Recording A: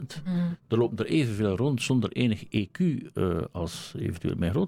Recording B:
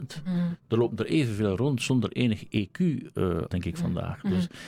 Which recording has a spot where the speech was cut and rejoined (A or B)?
B